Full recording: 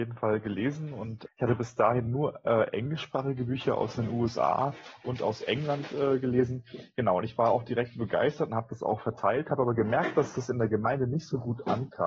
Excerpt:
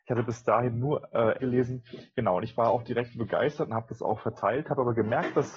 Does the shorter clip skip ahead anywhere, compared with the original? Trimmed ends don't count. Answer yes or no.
yes